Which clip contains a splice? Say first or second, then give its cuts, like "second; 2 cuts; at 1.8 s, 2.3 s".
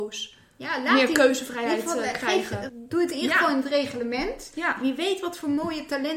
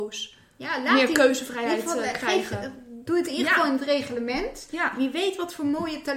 first; 1 cut; at 2.7 s